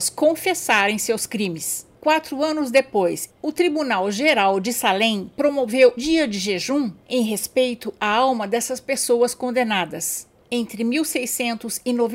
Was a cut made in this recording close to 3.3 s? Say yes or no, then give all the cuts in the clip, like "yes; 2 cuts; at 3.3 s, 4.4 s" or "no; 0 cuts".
yes; 3 cuts; at 3.3 s, 6.0 s, 10.4 s